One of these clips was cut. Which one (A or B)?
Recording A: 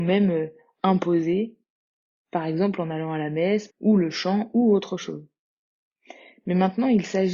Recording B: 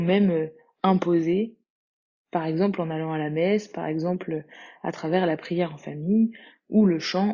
A